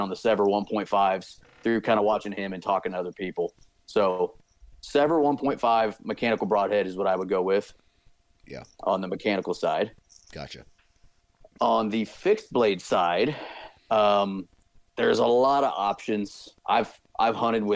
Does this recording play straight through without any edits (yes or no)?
no